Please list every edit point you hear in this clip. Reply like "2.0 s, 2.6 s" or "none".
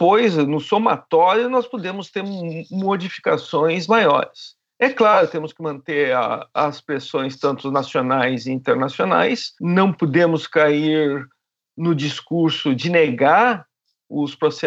9.6 s